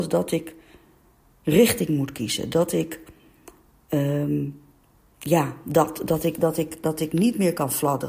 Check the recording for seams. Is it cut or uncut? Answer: uncut